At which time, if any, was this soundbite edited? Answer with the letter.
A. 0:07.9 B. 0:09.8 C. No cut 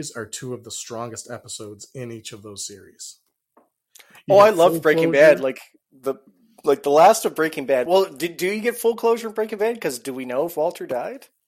C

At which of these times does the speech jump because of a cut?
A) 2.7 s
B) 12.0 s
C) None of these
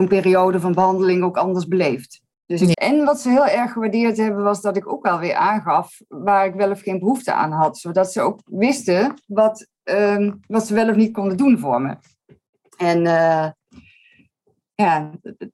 A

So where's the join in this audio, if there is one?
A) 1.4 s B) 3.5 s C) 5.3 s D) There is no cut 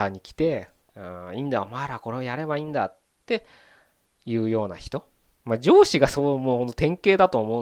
C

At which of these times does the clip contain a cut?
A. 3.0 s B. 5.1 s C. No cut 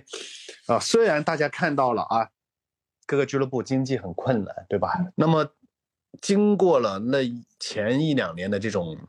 B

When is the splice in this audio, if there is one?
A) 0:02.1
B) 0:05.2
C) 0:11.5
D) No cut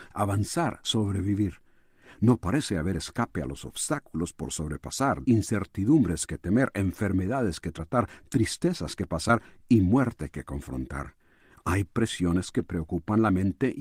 B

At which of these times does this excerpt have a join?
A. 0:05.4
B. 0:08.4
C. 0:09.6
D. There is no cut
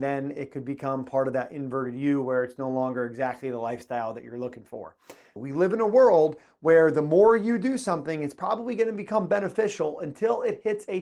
A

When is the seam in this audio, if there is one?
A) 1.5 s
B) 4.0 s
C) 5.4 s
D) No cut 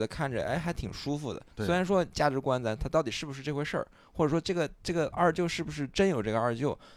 A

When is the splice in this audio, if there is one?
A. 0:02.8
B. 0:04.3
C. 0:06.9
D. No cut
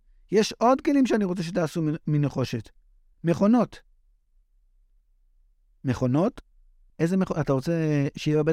C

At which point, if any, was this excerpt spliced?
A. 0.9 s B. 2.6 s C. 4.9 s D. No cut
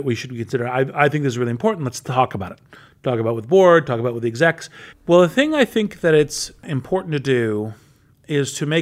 C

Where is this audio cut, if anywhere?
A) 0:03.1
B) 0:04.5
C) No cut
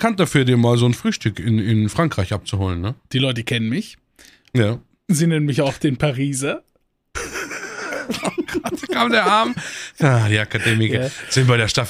A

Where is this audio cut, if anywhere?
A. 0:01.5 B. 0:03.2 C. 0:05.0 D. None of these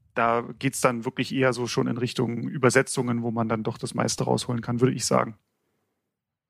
D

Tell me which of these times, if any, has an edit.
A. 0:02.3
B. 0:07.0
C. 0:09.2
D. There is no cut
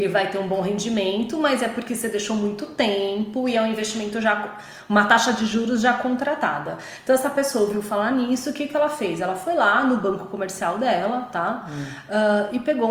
D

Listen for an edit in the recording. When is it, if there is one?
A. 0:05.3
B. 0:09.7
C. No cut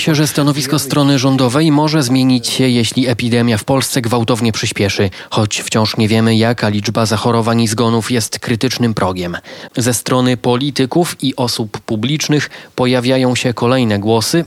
B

